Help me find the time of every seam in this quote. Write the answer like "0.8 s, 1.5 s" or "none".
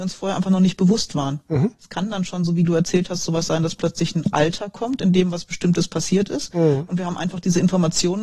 none